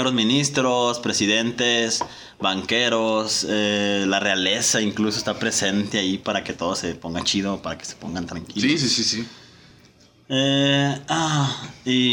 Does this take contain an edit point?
no; 0 cuts

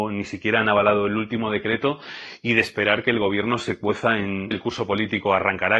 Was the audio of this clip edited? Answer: yes; 1 cut; at 4.5 s

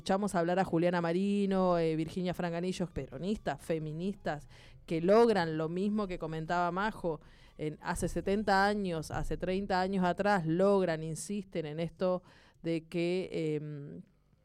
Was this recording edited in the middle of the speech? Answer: yes; 1 cut; at 2.9 s

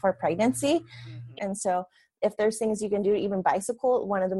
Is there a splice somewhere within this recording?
yes; 1 cut; at 1.4 s

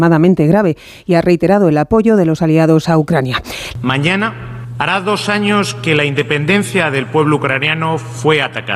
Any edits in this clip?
yes; 2 cuts; at 3.7 s, 4.7 s

